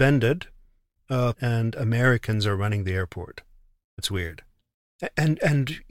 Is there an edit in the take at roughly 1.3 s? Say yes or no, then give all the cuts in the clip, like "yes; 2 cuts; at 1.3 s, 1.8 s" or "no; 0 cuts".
yes; 1 cut; at 1.3 s